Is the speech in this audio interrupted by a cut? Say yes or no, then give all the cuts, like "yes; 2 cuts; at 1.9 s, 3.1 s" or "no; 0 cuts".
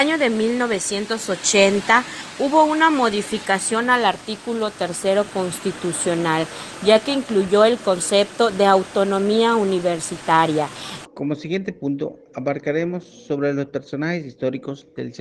yes; 1 cut; at 11.1 s